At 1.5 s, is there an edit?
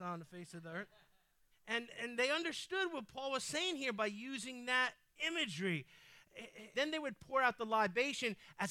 yes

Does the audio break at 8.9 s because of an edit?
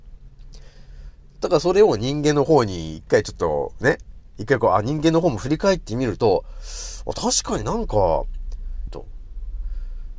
yes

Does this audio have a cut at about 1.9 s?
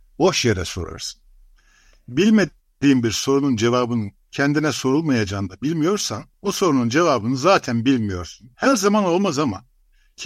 no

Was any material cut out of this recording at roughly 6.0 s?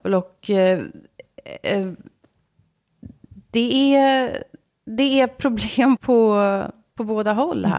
yes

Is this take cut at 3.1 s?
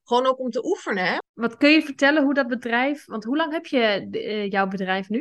no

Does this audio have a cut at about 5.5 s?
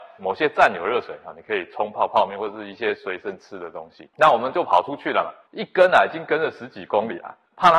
yes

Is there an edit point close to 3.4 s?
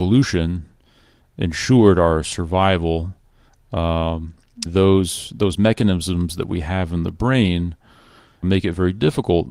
no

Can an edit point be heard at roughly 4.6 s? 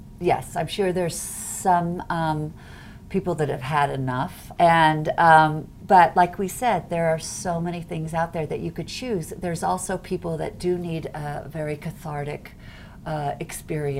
yes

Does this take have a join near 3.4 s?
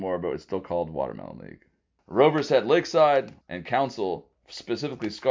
yes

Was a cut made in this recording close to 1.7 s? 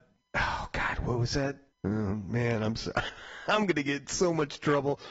yes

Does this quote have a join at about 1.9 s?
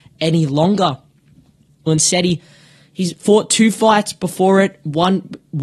yes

